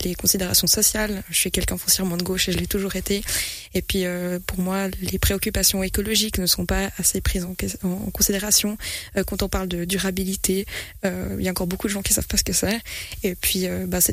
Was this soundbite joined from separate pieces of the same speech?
no; 0 cuts

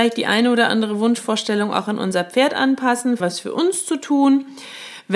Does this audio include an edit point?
yes; 1 cut; at 3.2 s

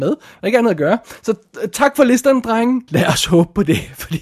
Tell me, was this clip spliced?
yes; 1 cut; at 2.9 s

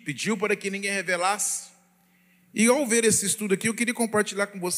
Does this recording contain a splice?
no; 0 cuts

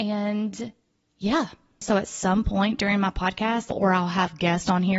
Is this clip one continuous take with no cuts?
no; 2 cuts; at 1.8 s, 3.7 s

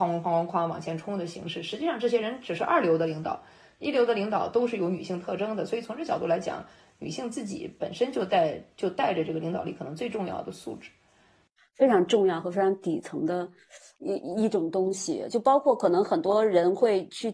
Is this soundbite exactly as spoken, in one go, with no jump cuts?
no; 1 cut; at 11.6 s

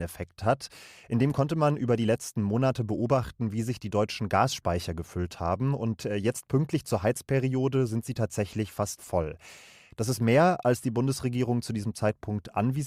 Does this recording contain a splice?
no; 0 cuts

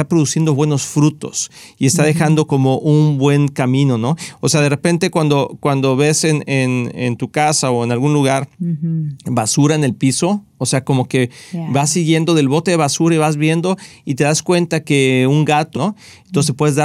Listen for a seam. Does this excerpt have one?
yes; 2 cuts; at 8.5 s, 15.7 s

